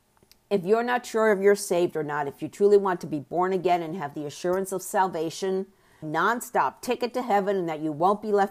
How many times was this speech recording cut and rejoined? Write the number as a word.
one